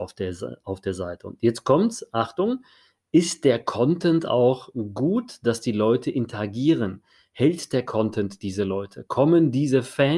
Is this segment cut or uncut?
uncut